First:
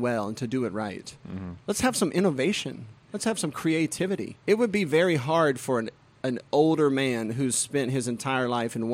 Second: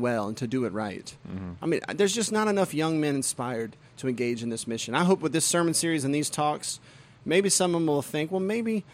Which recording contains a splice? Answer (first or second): first